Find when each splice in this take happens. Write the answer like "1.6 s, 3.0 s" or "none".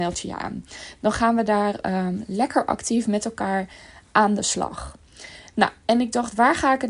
none